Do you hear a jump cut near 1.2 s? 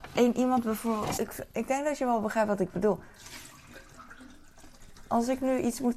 yes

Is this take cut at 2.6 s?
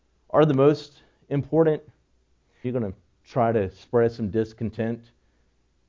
yes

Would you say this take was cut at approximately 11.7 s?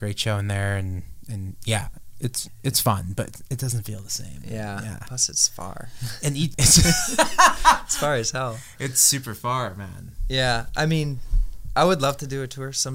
no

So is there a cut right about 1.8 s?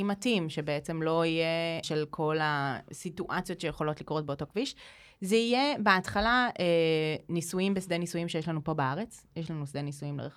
yes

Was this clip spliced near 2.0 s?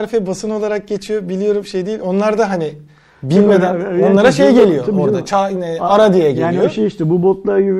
no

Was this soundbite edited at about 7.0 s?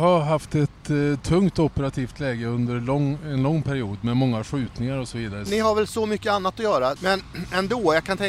yes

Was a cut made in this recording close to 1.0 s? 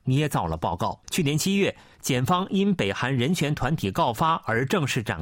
yes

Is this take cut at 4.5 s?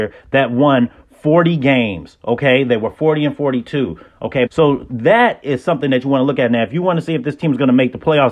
yes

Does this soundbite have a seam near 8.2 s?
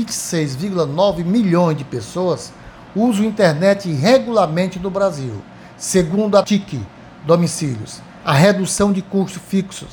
yes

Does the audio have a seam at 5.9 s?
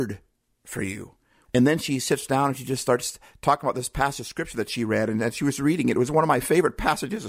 no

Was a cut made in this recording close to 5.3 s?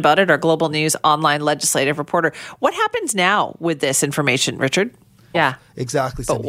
yes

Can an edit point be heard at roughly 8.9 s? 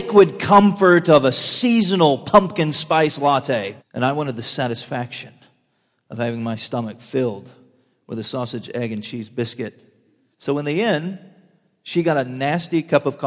no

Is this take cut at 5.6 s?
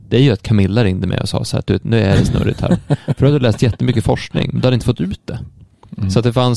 no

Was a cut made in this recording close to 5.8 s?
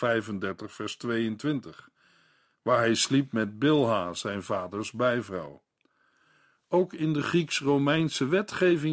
no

